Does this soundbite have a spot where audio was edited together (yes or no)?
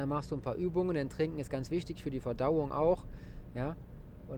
no